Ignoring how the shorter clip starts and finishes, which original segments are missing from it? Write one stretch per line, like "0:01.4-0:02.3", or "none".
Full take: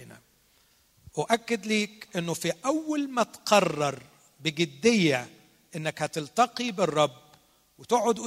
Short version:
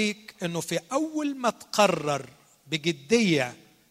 none